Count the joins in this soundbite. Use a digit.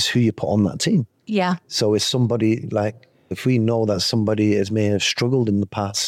1